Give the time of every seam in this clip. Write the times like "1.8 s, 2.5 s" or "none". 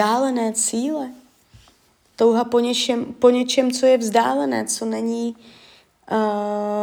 none